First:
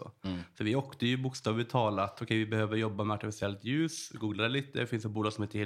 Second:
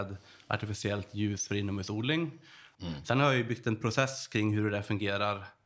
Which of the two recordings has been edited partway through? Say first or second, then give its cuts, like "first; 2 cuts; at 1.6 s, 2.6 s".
second; 1 cut; at 2.8 s